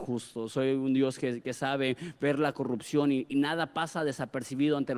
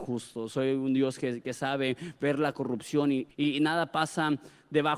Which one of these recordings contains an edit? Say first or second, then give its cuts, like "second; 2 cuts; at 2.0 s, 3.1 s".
second; 1 cut; at 3.3 s